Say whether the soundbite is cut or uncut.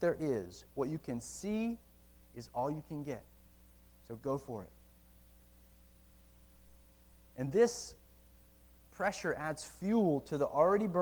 uncut